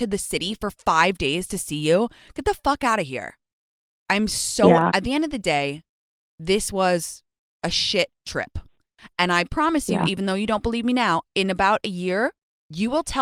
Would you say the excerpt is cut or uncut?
cut